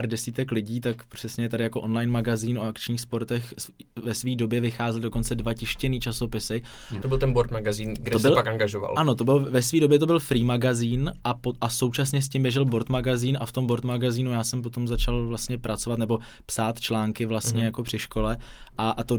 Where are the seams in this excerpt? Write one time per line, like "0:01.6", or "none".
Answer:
0:07.0
0:11.2